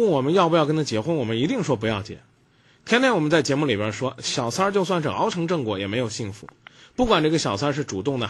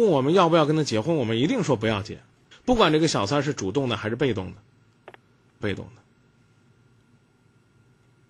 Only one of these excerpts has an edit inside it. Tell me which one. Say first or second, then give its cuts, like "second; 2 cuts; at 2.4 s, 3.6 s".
second; 2 cuts; at 2.5 s, 5.6 s